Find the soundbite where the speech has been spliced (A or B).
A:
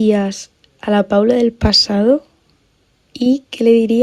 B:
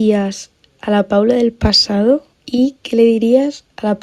B